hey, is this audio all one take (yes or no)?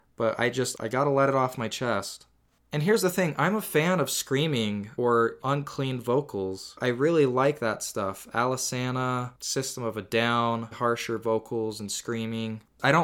no